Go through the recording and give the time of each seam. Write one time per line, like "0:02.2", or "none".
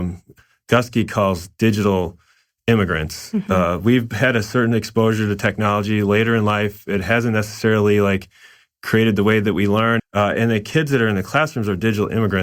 0:10.0